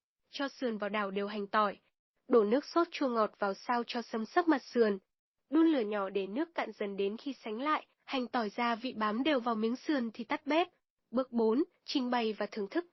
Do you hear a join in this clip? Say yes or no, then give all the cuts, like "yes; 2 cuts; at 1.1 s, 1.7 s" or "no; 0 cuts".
no; 0 cuts